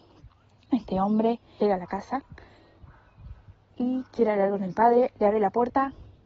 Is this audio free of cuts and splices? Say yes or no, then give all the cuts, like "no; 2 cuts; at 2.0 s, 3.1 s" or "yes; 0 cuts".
no; 1 cut; at 1.6 s